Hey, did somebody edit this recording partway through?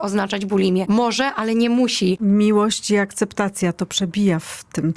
yes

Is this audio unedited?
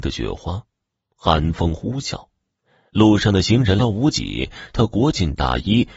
no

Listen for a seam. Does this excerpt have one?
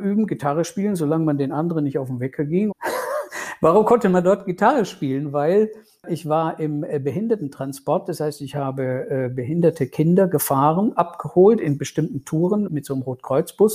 yes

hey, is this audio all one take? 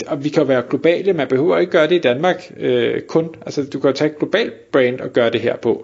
yes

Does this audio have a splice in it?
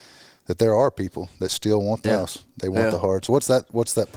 yes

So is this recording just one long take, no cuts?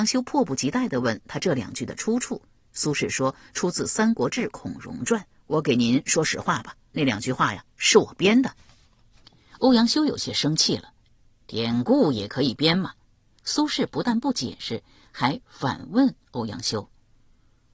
no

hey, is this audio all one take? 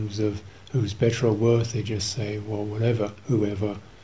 yes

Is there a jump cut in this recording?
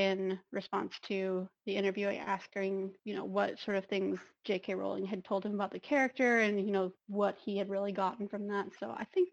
no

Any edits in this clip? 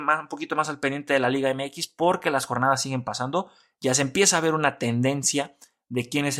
no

